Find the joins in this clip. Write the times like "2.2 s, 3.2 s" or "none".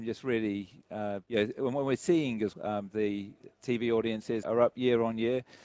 1.2 s, 2.5 s, 4.4 s